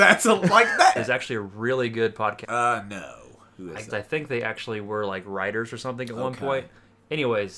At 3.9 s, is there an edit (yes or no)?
yes